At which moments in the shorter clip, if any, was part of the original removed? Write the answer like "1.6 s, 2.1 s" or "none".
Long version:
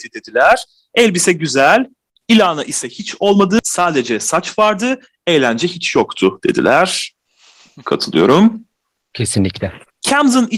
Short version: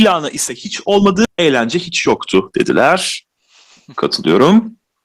1.3 s